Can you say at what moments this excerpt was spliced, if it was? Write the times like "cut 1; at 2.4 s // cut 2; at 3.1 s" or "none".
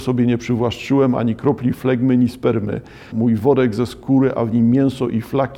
cut 1; at 3.1 s